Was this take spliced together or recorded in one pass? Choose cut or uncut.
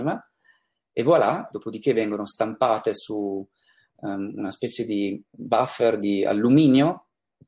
cut